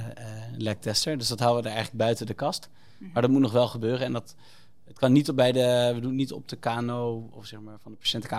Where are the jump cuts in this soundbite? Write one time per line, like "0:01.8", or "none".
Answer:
none